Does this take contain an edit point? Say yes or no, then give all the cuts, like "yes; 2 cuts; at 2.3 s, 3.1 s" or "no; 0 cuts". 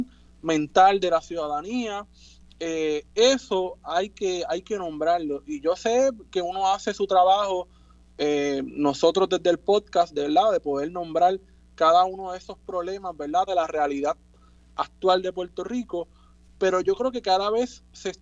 yes; 1 cut; at 13.5 s